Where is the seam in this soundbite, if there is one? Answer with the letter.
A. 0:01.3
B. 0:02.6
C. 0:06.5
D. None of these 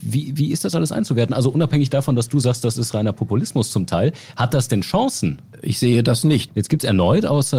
C